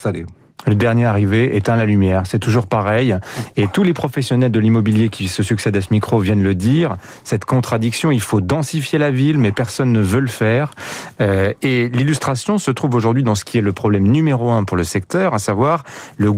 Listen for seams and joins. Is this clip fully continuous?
yes; 0 cuts

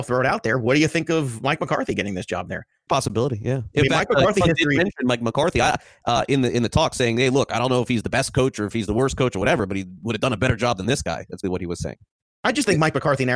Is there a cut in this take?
yes; 2 cuts; at 4.4 s, 11.4 s

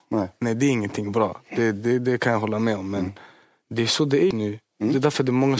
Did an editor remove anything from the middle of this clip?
yes; 1 cut; at 4.3 s

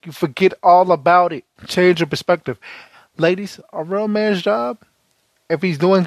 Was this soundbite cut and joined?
yes; 2 cuts; at 1.6 s, 3.6 s

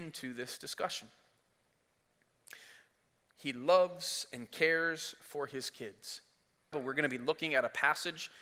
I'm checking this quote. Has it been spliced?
yes; 1 cut; at 6.7 s

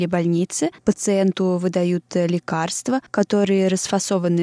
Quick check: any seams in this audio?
no; 0 cuts

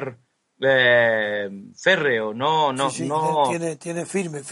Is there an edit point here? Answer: no; 0 cuts

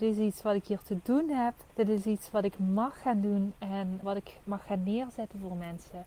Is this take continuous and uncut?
no; 2 cuts; at 1.7 s, 4.0 s

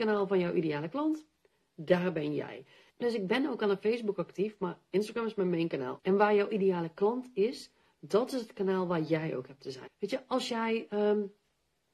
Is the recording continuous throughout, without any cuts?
no; 3 cuts; at 2.9 s, 6.0 s, 9.9 s

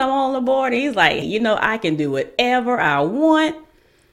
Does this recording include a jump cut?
yes; 1 cut; at 1.2 s

